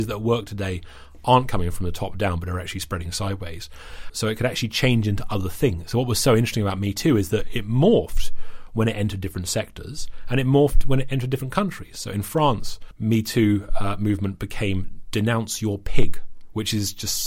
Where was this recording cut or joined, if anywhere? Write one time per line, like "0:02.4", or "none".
0:04.1